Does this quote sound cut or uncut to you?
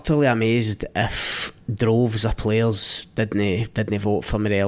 cut